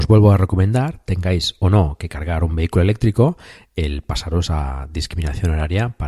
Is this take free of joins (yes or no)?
yes